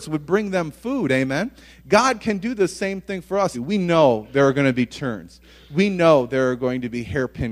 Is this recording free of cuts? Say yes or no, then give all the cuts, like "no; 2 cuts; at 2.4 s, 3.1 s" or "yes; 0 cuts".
no; 1 cut; at 3.5 s